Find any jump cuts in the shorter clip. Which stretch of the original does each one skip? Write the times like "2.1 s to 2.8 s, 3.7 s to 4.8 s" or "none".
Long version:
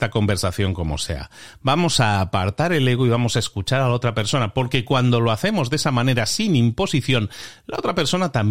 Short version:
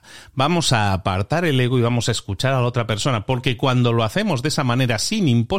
none